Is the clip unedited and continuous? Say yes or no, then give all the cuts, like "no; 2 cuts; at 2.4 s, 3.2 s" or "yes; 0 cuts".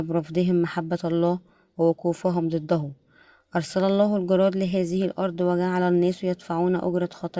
yes; 0 cuts